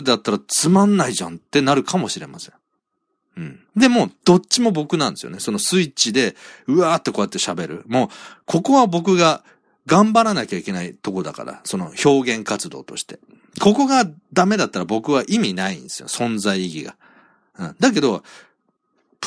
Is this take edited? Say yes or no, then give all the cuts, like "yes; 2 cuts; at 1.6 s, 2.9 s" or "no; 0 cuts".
yes; 1 cut; at 3.7 s